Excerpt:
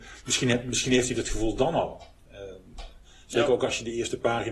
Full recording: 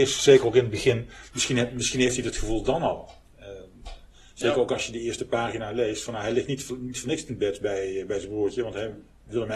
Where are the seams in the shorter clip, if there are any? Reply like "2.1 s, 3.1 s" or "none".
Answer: none

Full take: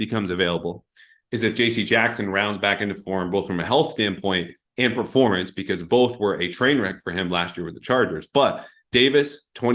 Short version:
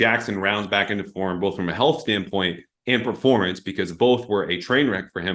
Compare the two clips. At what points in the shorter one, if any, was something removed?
none

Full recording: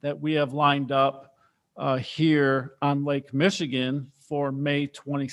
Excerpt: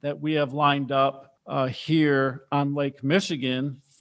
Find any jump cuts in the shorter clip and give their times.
1.4 s

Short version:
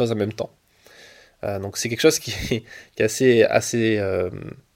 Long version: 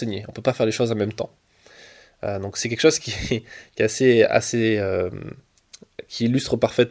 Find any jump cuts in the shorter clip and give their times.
none

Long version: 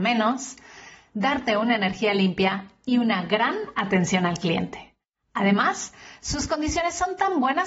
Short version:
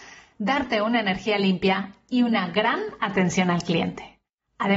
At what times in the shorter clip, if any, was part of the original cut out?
none

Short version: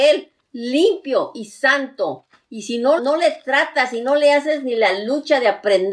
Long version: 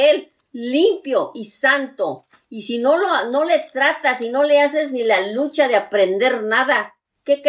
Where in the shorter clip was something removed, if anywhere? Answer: 3.0 s

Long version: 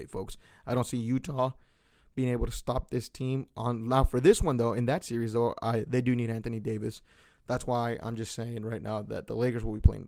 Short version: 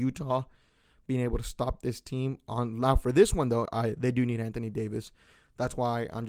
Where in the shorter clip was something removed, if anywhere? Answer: 3.7 s

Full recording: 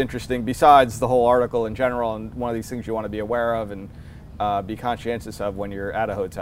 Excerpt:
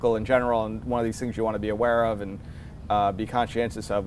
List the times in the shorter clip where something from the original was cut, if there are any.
none

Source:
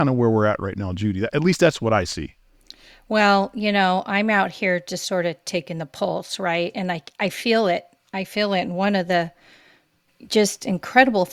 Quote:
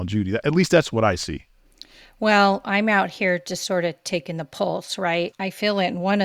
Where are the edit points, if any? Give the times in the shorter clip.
2.6 s, 5.3 s

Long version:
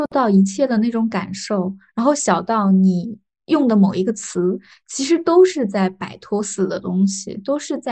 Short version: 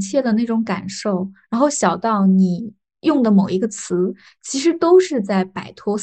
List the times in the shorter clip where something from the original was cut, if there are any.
none

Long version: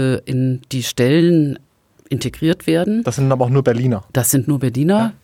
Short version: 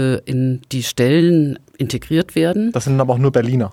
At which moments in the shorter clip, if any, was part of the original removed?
1.7 s

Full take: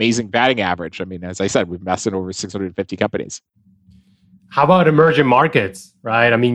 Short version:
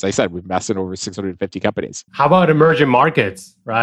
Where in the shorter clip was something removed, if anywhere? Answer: 2.1 s

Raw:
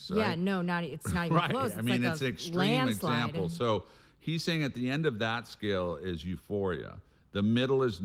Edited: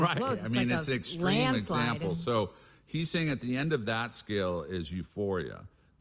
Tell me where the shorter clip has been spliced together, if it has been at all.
none

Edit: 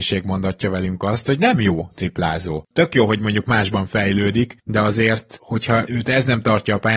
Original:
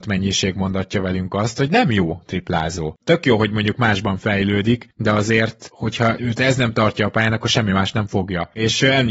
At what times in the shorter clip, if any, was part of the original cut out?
none

